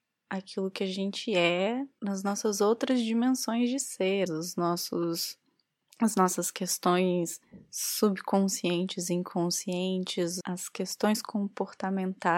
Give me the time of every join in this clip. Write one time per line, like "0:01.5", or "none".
0:04.3
0:10.4